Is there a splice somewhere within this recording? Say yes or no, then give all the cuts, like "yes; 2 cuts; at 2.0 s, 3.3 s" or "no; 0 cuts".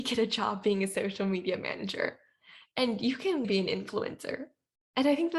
no; 0 cuts